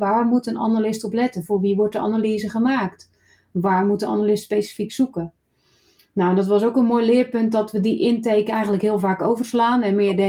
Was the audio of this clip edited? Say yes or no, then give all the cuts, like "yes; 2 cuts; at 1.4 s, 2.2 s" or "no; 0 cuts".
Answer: no; 0 cuts